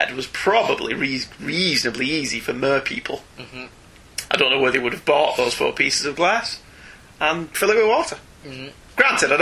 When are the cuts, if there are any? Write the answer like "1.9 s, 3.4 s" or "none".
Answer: 4.3 s